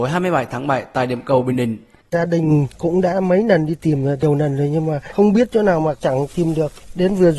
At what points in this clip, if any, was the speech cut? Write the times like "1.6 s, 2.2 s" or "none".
2.0 s